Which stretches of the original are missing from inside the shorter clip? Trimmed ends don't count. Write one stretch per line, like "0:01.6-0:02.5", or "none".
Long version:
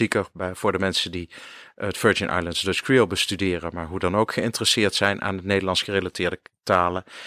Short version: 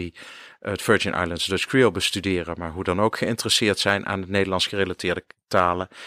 none